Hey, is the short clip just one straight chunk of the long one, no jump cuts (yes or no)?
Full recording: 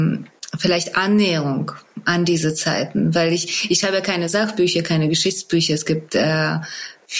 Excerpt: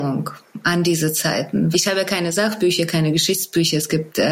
no